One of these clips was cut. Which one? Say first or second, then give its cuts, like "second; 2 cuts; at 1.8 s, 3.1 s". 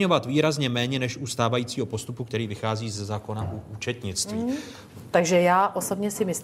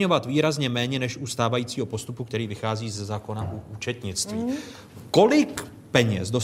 first; 1 cut; at 5.1 s